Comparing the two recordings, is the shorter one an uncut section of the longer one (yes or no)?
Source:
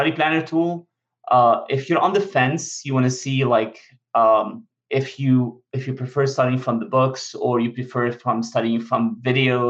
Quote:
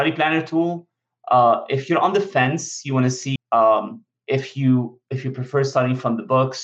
no